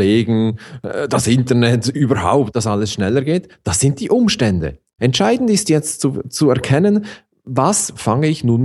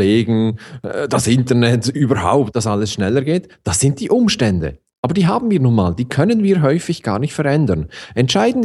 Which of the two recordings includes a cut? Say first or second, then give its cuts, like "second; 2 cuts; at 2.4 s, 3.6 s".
first; 1 cut; at 5.0 s